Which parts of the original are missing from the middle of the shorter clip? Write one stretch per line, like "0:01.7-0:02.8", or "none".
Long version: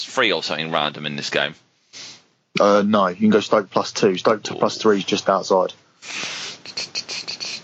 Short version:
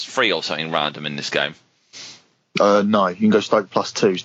none